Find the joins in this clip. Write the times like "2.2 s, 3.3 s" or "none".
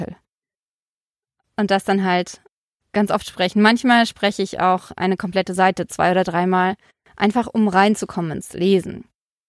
none